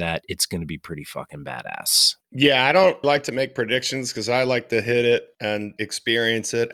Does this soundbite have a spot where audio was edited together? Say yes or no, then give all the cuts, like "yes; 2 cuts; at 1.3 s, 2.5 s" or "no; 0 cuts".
yes; 2 cuts; at 3.0 s, 5.8 s